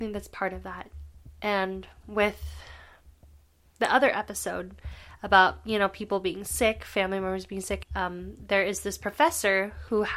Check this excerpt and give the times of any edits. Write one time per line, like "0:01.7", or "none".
0:07.8